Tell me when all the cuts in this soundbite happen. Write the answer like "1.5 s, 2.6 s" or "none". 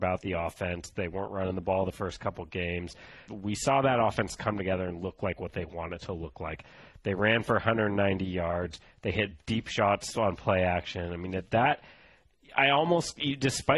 3.3 s

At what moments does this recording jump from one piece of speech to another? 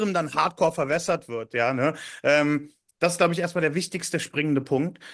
none

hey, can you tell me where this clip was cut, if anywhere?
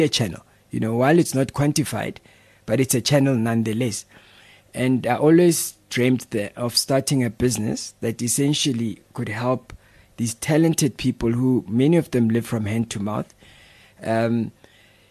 none

